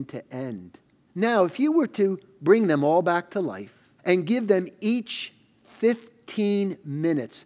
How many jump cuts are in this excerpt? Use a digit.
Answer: 2